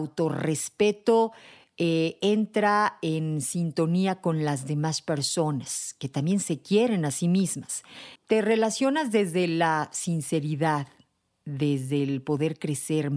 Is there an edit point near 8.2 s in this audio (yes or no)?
yes